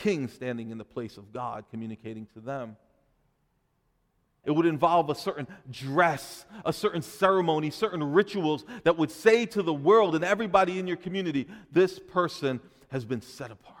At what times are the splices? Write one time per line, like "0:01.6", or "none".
0:04.4